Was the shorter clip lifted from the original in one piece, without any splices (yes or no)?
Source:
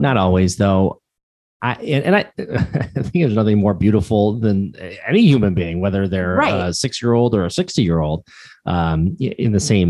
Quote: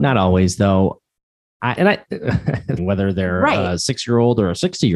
no